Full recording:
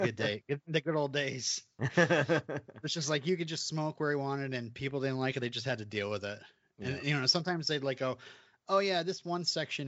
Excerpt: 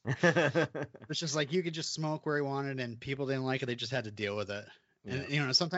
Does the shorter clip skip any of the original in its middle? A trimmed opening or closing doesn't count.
no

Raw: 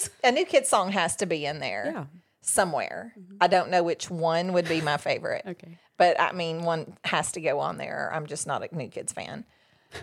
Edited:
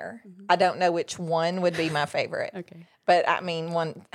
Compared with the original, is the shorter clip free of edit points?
yes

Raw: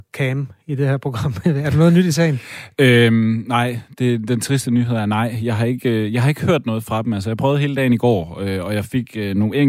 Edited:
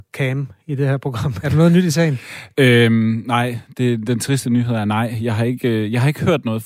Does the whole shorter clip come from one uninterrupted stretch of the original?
no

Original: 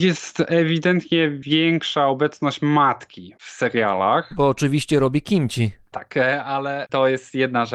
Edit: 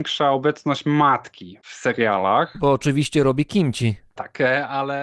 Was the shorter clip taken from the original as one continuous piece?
yes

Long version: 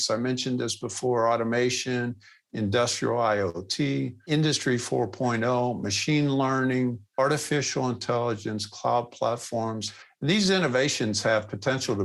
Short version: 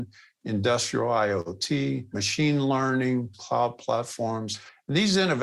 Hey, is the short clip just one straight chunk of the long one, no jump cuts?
no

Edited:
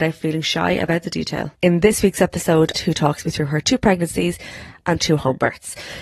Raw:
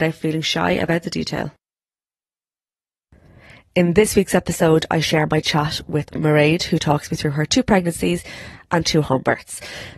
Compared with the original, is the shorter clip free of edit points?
no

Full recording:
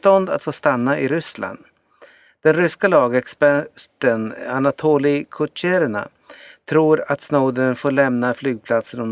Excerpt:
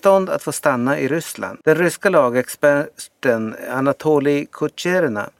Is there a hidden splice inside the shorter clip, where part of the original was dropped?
yes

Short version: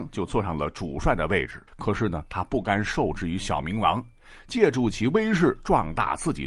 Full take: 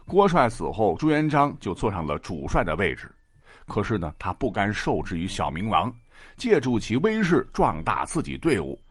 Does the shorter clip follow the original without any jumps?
no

